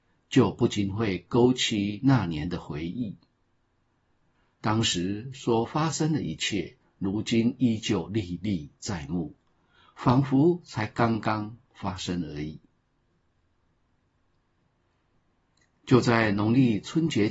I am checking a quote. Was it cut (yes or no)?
no